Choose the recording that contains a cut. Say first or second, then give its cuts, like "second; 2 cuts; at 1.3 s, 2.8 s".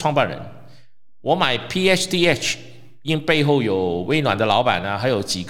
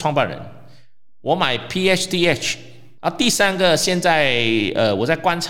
second; 1 cut; at 3.0 s